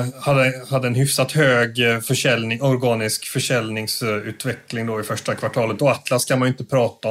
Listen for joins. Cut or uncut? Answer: cut